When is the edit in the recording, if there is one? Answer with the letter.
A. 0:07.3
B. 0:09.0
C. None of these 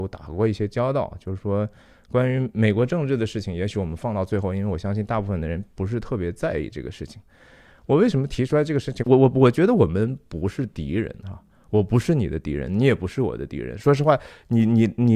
B